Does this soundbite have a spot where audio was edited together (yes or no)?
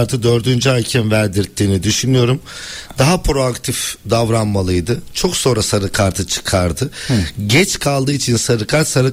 no